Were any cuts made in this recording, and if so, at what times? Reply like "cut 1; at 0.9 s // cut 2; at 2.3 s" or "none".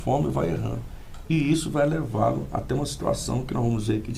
cut 1; at 1.2 s